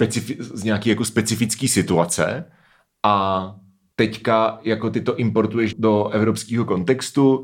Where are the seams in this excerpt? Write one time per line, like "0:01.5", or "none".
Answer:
0:05.7